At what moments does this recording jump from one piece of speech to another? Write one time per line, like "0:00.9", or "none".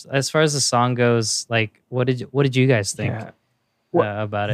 none